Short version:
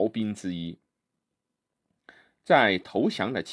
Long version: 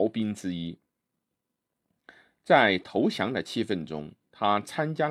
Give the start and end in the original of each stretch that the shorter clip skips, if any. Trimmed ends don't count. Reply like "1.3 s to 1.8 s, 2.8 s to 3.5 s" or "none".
none